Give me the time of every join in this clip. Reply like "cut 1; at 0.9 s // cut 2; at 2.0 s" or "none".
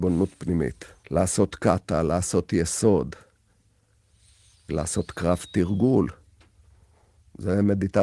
cut 1; at 1.0 s // cut 2; at 4.7 s